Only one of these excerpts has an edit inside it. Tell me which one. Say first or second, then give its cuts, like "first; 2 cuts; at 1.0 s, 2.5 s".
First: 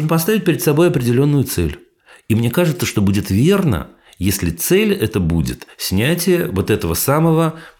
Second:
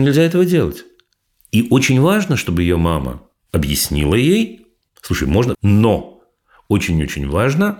second; 1 cut; at 5.5 s